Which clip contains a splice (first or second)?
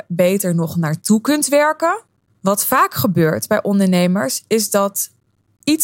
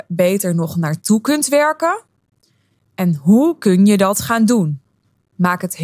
first